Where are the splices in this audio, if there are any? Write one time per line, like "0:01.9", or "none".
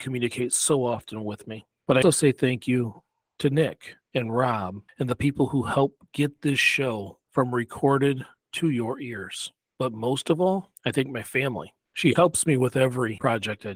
0:02.0
0:11.9